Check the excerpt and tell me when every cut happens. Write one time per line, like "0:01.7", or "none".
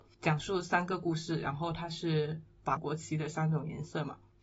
0:02.8